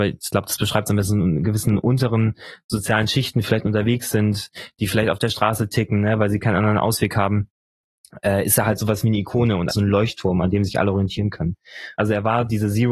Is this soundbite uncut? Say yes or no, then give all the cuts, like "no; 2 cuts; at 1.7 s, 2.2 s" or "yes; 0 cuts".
no; 2 cuts; at 9.7 s, 12.0 s